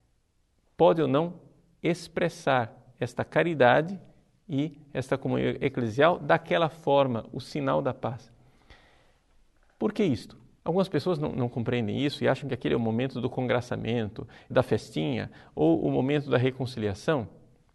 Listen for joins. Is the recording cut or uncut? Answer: cut